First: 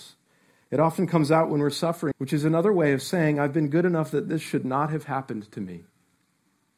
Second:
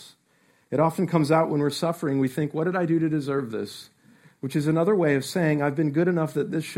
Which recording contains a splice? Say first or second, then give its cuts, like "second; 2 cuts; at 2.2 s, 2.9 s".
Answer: first; 1 cut; at 2.1 s